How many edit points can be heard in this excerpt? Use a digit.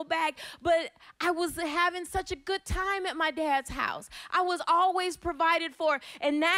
0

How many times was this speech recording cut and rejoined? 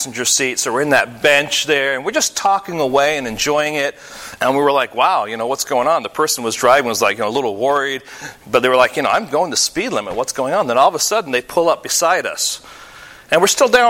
1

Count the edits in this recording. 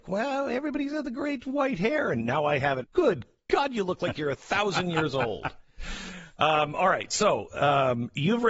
1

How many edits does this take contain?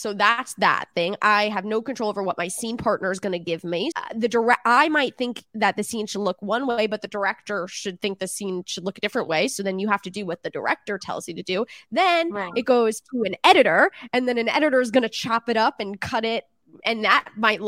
1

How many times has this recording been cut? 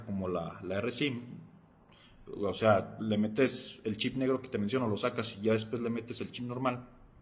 0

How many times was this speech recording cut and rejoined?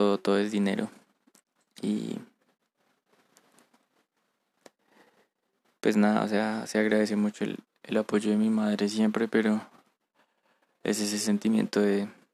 0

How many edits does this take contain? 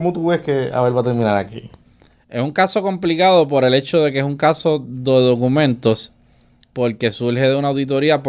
0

